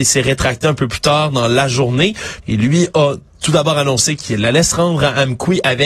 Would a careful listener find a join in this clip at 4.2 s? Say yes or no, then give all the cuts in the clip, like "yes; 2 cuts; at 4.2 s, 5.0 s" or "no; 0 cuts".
no; 1 cut; at 2.4 s